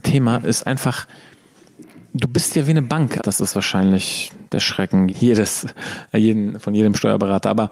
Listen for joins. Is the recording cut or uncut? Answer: cut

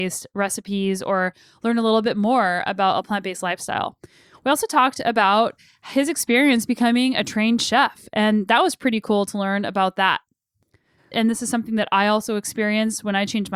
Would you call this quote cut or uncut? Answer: cut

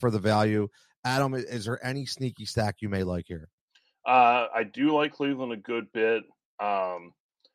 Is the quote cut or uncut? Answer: uncut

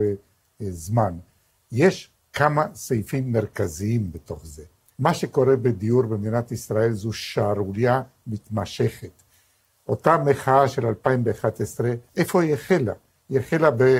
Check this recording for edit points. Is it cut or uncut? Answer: cut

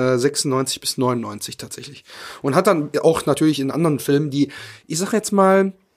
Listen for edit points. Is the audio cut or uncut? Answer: uncut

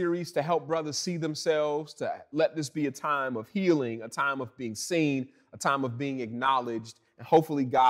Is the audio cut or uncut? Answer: uncut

